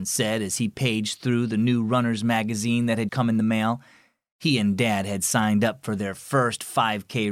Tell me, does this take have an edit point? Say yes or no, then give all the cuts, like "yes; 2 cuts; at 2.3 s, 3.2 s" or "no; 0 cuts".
yes; 1 cut; at 3.1 s